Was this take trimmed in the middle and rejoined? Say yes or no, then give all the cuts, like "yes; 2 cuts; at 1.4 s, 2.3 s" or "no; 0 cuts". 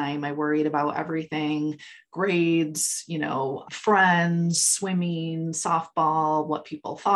no; 0 cuts